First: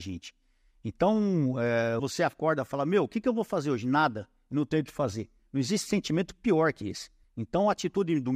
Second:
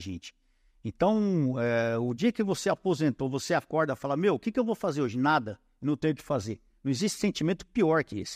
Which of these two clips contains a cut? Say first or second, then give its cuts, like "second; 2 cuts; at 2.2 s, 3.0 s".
first; 2 cuts; at 2.0 s, 7.2 s